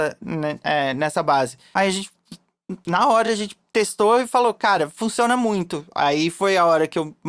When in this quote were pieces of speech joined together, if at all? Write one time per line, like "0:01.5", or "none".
none